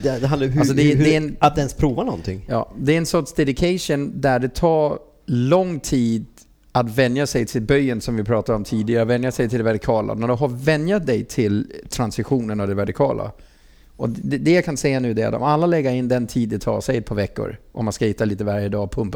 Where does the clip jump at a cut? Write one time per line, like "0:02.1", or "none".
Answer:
none